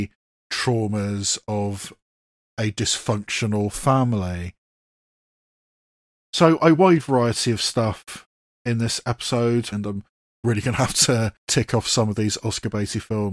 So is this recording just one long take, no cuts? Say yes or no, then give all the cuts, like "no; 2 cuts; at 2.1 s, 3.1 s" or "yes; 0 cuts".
no; 2 cuts; at 9.7 s, 11.4 s